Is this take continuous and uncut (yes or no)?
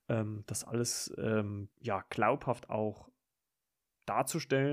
no